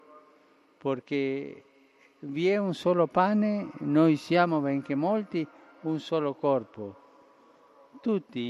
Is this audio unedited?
yes; 0 cuts

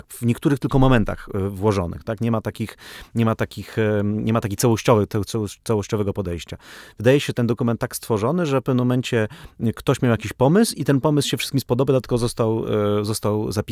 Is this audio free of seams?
no; 1 cut; at 5.3 s

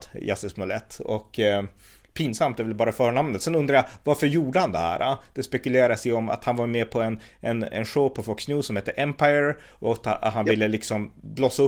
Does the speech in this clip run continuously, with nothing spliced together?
yes; 0 cuts

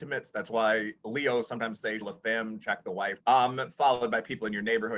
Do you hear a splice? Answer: yes; 2 cuts; at 2.0 s, 3.2 s

